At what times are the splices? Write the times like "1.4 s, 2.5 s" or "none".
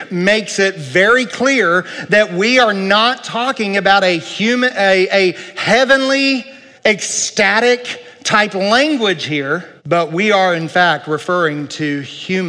6.8 s, 9.8 s